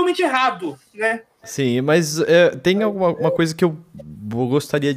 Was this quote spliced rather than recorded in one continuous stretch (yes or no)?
no